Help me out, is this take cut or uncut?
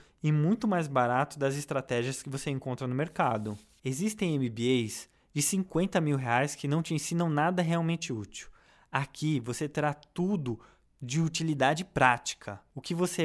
uncut